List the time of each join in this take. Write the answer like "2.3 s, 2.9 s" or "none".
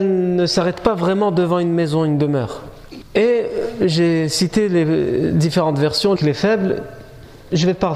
3.0 s, 6.2 s